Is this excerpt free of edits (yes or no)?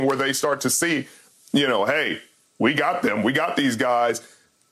yes